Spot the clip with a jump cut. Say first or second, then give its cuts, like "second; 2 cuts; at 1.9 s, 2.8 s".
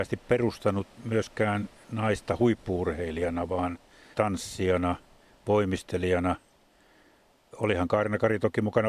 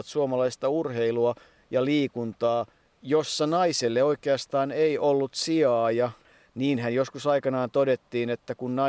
first; 1 cut; at 4.1 s